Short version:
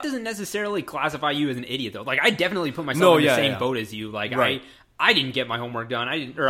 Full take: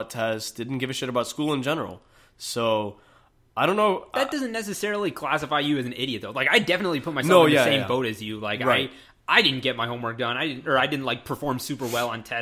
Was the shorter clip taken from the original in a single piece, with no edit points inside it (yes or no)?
yes